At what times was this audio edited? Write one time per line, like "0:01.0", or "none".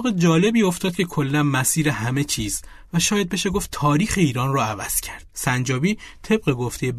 0:05.3